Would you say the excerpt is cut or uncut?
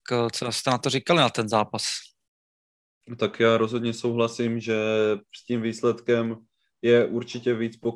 uncut